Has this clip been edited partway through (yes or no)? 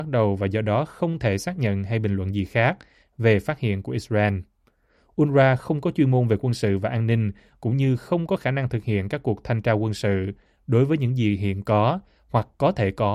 no